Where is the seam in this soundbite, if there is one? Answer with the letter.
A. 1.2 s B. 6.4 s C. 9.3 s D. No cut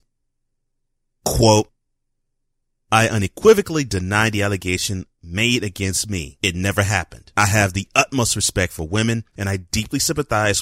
C